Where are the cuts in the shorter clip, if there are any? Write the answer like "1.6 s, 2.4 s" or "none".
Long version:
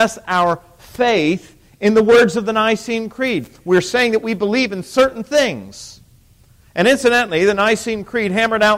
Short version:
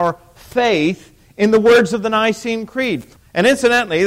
3.2 s